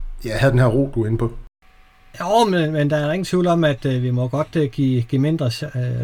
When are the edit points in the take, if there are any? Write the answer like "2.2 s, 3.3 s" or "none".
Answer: none